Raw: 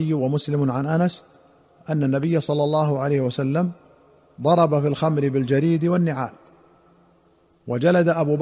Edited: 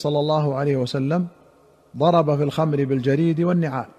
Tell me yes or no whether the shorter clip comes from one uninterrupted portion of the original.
yes